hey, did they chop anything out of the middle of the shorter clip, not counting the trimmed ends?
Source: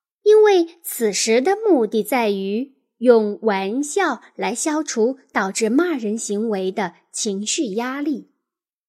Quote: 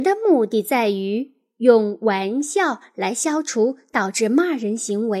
no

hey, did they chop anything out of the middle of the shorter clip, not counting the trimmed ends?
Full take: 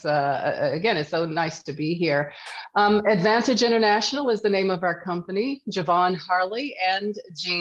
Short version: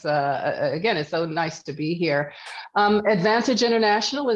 no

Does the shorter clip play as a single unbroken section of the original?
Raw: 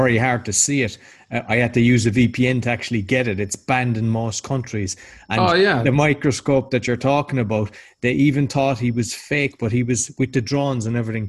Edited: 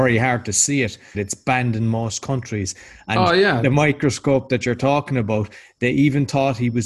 no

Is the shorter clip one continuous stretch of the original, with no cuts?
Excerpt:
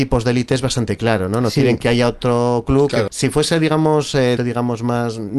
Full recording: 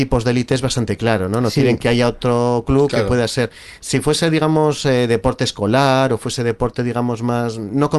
no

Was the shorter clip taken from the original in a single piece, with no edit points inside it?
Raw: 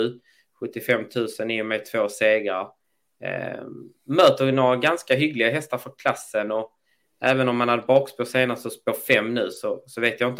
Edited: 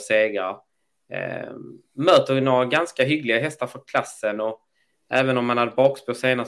yes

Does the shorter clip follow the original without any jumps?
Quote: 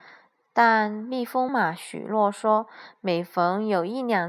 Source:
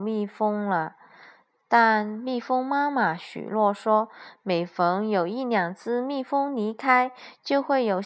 no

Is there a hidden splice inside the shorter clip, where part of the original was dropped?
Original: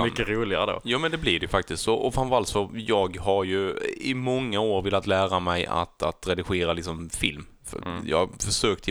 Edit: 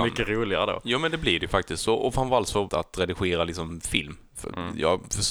yes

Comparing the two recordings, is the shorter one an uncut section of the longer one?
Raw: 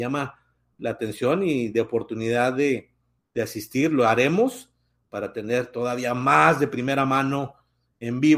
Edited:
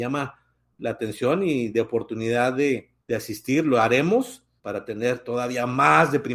no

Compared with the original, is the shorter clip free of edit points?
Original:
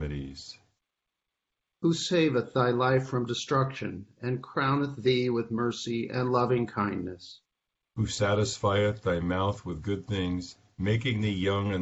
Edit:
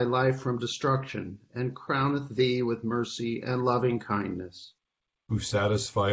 yes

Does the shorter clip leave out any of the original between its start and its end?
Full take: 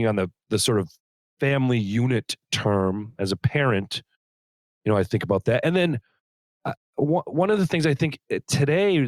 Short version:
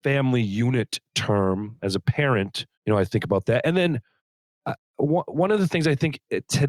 yes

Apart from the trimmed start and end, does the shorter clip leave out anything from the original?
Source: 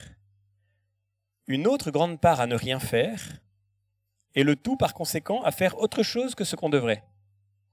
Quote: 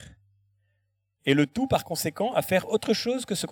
yes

